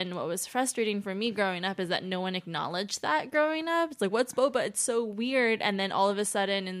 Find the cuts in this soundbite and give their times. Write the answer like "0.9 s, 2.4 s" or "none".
none